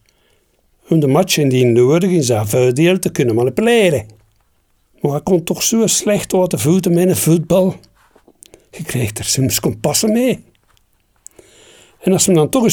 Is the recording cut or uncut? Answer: uncut